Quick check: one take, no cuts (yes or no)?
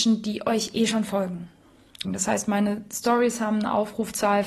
no